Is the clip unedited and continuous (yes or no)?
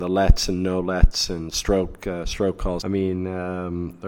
no